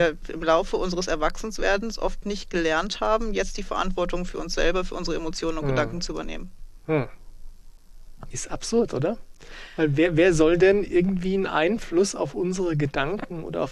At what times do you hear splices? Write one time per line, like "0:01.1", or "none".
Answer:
0:08.3